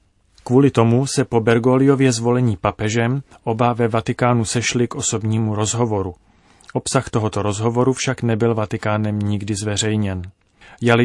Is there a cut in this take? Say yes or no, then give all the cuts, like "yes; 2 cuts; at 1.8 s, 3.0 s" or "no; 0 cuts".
no; 0 cuts